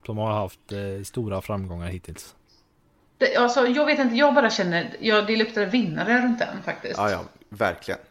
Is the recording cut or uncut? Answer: uncut